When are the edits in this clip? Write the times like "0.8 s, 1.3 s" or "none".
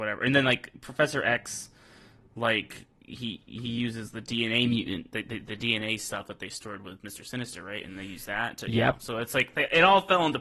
none